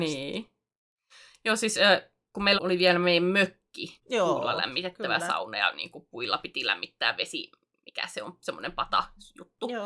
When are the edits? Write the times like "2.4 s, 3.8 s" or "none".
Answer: 2.6 s, 4.0 s